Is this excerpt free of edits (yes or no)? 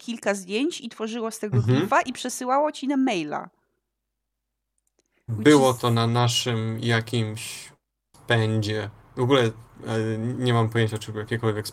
yes